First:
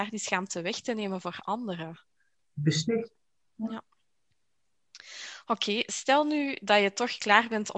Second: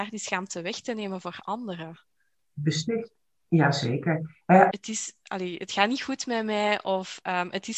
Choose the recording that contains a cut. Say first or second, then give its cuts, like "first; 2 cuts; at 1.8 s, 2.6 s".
second; 2 cuts; at 3.4 s, 4.7 s